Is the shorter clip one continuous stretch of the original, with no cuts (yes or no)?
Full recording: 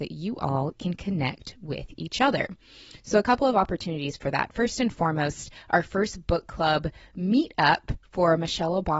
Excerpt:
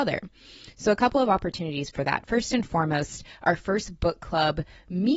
yes